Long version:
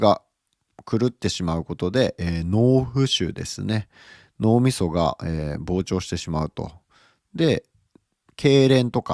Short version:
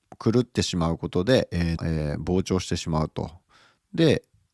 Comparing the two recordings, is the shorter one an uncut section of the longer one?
no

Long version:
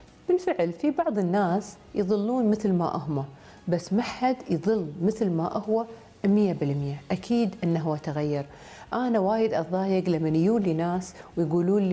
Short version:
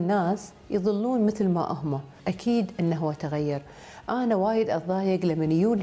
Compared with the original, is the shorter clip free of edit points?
no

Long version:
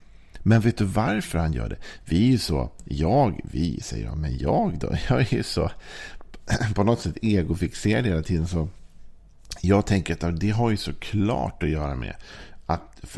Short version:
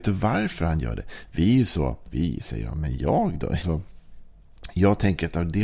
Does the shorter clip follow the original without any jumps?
no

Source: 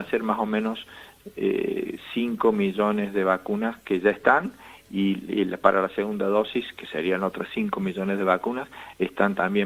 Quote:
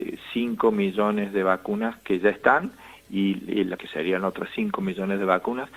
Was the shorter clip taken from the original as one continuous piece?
no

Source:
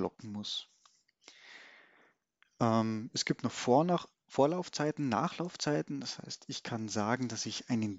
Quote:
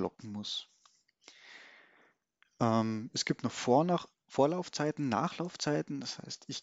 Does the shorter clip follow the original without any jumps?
yes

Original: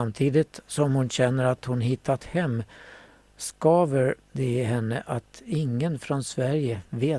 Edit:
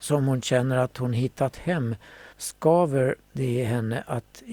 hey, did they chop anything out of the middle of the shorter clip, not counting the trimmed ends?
yes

